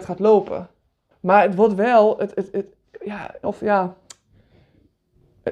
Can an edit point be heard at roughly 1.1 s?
yes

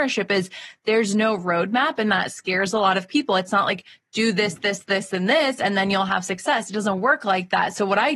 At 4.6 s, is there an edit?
no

